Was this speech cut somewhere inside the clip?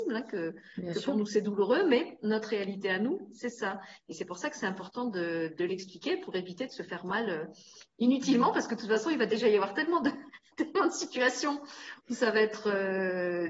no; 0 cuts

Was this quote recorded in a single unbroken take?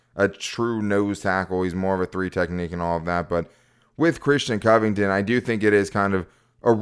yes; 0 cuts

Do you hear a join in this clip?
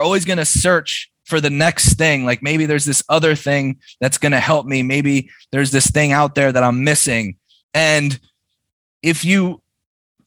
yes; 1 cut; at 7.6 s

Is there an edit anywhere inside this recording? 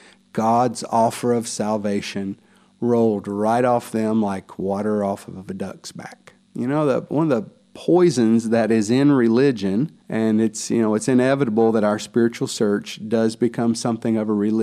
yes; 2 cuts; at 6.5 s, 10.0 s

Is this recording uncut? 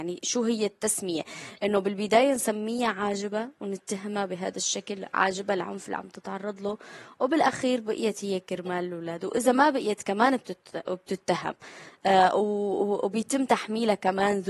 yes; 0 cuts

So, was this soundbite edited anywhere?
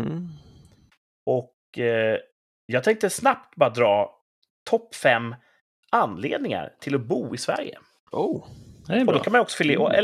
no; 0 cuts

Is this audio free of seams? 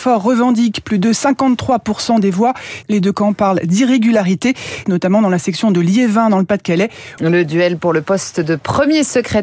no; 3 cuts; at 2.8 s, 4.8 s, 7.2 s

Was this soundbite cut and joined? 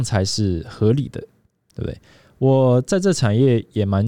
no; 0 cuts

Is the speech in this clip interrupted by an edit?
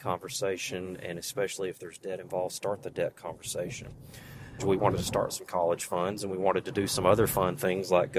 yes; 1 cut; at 4.6 s

